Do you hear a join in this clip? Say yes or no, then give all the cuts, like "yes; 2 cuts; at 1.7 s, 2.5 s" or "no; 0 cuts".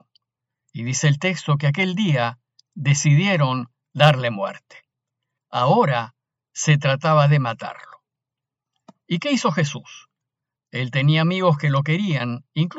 yes; 1 cut; at 5.4 s